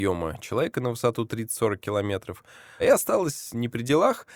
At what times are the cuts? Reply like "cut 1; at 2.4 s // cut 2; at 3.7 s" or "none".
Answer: cut 1; at 2.8 s